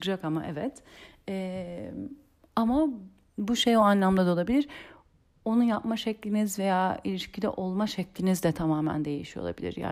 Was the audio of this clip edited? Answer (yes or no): no